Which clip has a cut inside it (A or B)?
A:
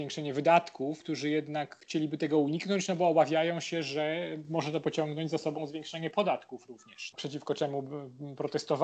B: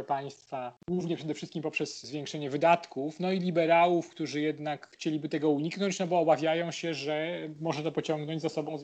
A